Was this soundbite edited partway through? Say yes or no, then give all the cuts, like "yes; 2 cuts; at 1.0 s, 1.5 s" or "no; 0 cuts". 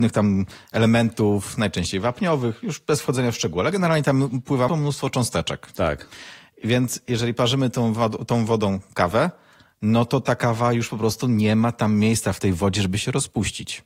yes; 1 cut; at 4.7 s